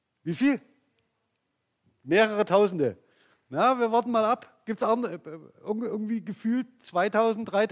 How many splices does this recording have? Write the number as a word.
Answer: zero